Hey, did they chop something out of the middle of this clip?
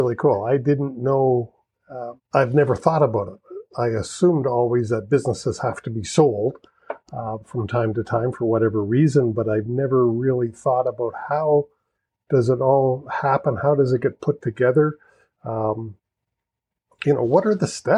yes; 1 cut; at 2.2 s

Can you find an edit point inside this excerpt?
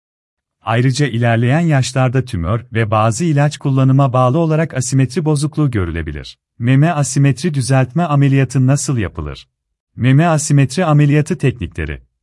yes; 2 cuts; at 6.5 s, 9.9 s

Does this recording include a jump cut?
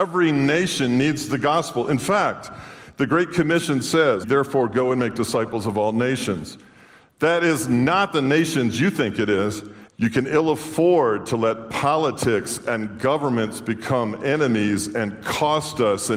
yes; 2 cuts; at 4.2 s, 9.9 s

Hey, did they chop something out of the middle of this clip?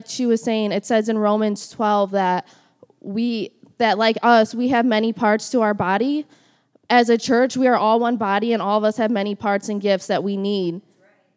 no; 0 cuts

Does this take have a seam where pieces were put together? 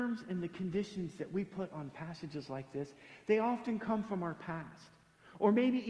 no; 0 cuts

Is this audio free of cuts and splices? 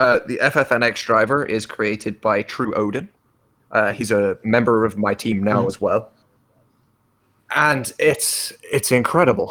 yes; 0 cuts

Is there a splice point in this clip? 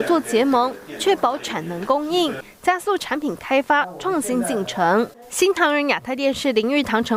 no; 0 cuts

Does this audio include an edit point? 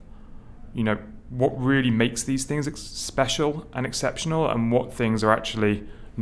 no; 0 cuts

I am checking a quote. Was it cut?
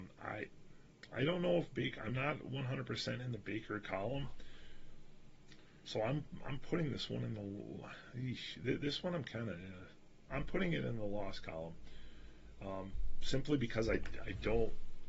no; 0 cuts

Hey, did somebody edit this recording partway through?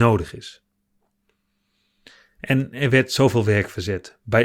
no; 0 cuts

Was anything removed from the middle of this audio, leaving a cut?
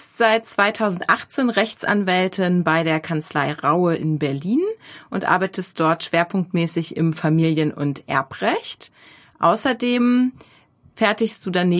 no; 0 cuts

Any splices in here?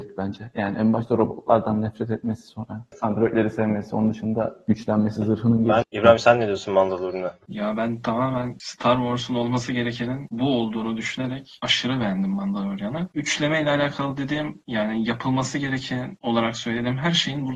yes; 1 cut; at 5.8 s

